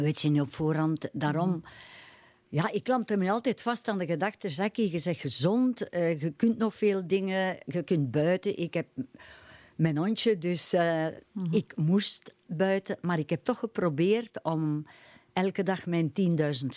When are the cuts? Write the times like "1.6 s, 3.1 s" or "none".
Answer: none